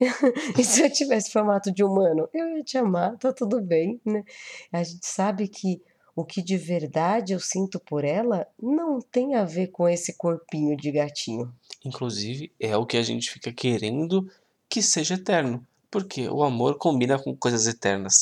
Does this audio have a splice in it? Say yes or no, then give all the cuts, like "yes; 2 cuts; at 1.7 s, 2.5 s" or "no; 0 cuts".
no; 0 cuts